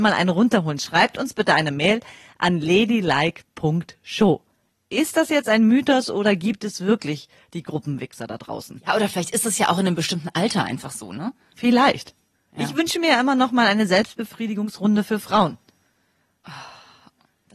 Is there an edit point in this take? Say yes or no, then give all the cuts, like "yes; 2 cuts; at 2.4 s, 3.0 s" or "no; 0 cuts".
yes; 1 cut; at 11.5 s